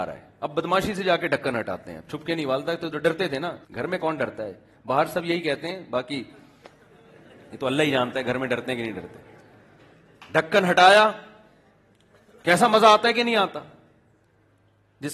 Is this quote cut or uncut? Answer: cut